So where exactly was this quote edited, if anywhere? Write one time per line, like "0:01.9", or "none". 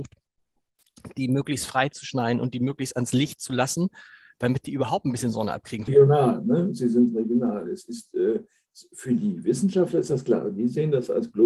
0:05.9